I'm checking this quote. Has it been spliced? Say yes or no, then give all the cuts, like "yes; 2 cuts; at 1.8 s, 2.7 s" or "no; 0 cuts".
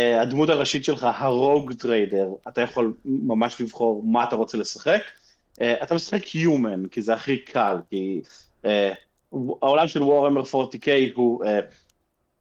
no; 0 cuts